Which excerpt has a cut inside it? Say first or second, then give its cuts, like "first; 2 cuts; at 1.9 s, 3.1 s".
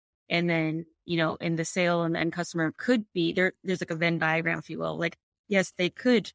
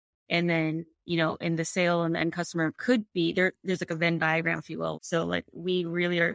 second; 1 cut; at 4.9 s